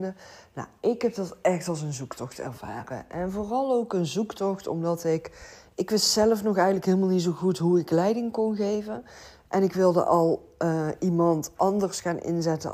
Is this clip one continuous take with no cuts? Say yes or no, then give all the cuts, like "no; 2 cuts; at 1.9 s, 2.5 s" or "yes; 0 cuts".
yes; 0 cuts